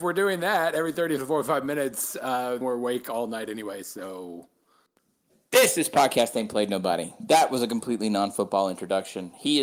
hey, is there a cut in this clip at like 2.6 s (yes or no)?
yes